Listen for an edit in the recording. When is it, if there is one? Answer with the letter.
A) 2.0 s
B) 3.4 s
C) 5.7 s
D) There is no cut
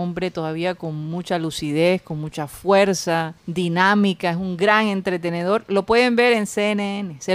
B